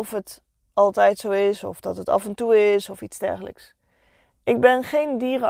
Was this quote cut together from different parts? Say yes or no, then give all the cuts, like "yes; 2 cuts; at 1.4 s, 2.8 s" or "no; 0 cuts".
no; 0 cuts